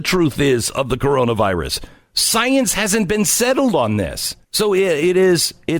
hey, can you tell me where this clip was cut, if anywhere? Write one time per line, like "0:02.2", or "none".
0:04.4